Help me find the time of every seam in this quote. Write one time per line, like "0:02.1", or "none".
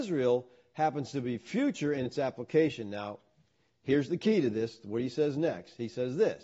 none